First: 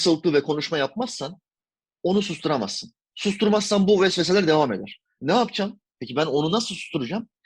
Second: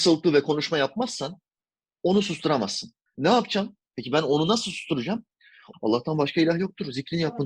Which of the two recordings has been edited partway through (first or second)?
second